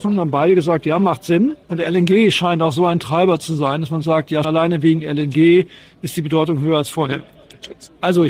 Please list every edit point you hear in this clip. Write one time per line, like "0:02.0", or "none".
0:01.6
0:04.4